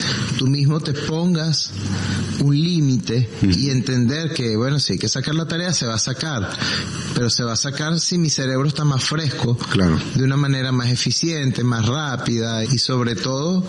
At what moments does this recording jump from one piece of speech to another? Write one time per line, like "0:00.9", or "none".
0:12.6

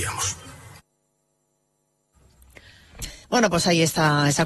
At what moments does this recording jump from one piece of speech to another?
0:03.2

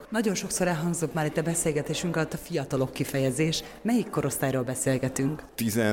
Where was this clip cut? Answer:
none

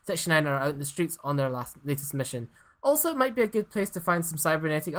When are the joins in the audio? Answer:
none

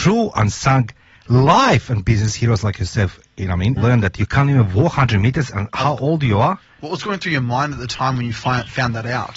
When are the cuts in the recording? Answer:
0:03.8

